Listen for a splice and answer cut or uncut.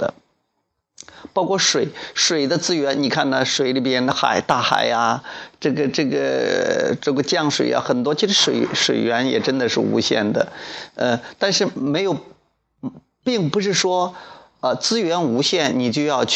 uncut